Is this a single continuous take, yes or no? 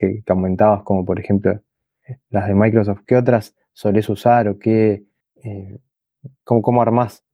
yes